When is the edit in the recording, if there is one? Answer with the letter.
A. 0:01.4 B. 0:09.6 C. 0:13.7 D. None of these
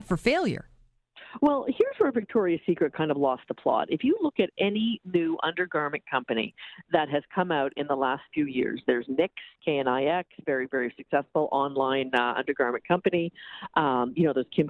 B